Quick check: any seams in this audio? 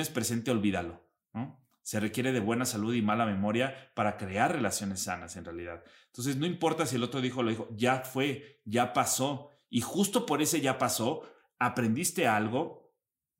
no; 0 cuts

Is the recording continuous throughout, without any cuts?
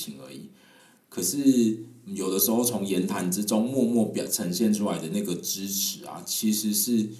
yes; 0 cuts

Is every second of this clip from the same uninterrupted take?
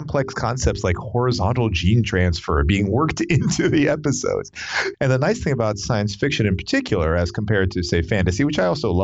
no; 1 cut; at 4.9 s

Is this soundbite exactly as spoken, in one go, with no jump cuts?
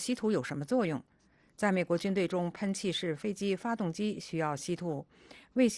yes; 0 cuts

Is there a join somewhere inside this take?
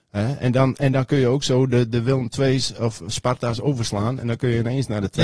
no; 0 cuts

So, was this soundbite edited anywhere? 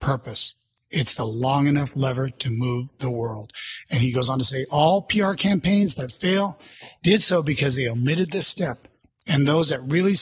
no; 0 cuts

